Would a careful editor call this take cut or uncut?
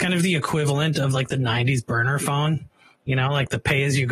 uncut